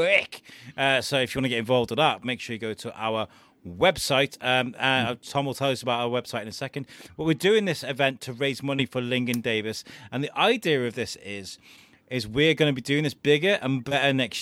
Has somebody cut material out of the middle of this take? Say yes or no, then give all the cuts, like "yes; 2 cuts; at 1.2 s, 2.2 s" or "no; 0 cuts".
no; 0 cuts